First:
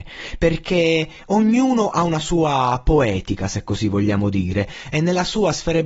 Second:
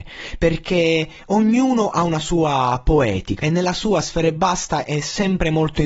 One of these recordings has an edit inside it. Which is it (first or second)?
second